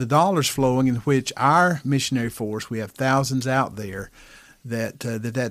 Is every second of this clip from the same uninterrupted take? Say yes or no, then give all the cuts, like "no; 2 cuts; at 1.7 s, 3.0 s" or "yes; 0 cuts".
yes; 0 cuts